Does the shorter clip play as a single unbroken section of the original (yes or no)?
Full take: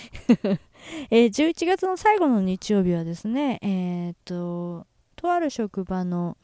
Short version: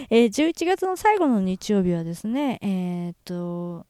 yes